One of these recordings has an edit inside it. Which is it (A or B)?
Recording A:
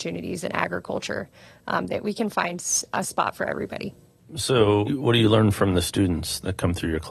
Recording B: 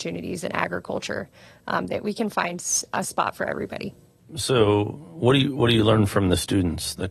A